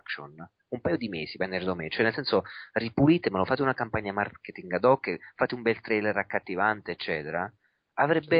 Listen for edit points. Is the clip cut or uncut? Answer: uncut